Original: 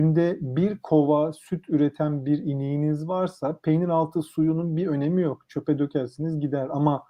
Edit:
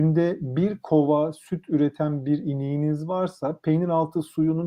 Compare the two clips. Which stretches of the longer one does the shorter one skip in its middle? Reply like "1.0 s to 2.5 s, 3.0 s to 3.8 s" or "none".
none